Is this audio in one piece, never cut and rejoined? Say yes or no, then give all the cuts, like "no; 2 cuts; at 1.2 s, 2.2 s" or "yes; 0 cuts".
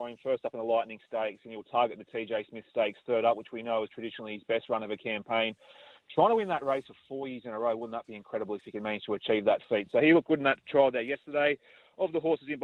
yes; 0 cuts